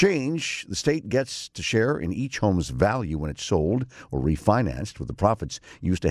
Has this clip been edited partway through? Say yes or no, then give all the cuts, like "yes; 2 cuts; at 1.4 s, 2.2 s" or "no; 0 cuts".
no; 0 cuts